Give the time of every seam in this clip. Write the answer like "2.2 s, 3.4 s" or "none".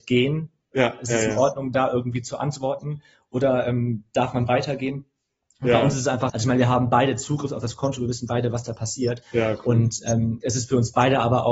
6.3 s